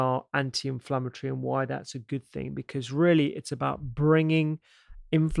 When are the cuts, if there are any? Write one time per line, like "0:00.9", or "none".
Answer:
none